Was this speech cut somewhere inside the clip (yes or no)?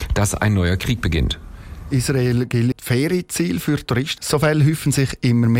yes